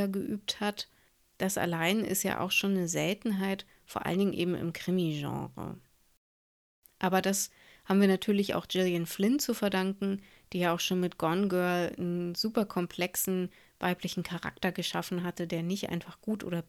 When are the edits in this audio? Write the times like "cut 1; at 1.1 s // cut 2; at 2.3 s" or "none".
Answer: none